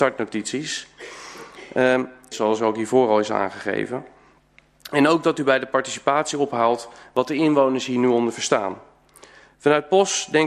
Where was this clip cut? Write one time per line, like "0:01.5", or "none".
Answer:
0:02.3